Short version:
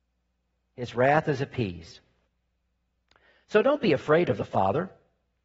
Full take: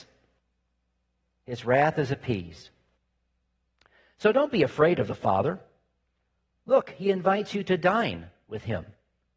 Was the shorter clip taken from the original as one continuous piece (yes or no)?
yes